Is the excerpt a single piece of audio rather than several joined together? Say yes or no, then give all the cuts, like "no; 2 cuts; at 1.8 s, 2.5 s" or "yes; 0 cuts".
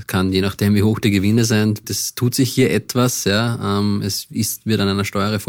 no; 1 cut; at 1.8 s